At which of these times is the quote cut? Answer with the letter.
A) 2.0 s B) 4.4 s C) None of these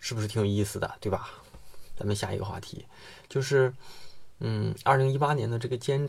A